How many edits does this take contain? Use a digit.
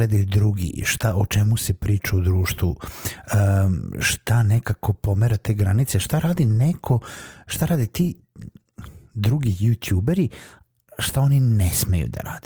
0